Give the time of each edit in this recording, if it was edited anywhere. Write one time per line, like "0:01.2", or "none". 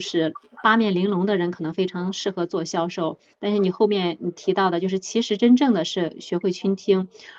none